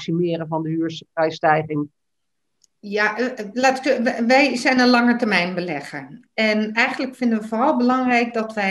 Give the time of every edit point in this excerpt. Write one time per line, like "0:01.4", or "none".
0:06.3